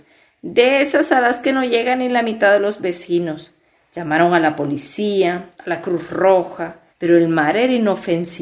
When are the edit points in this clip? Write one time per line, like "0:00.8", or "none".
0:05.5
0:06.9